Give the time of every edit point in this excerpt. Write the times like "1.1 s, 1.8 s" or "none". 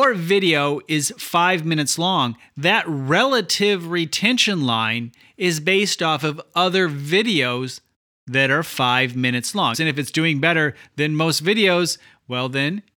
9.7 s